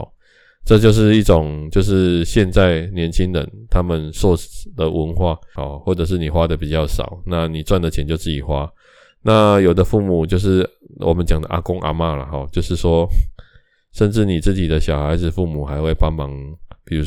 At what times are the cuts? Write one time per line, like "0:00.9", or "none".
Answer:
0:05.6